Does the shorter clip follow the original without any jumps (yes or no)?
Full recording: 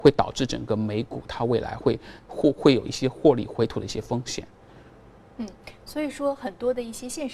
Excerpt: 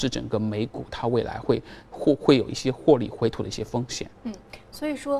no